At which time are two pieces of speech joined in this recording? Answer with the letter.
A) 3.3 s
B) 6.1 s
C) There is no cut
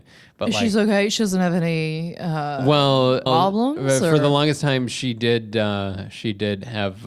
A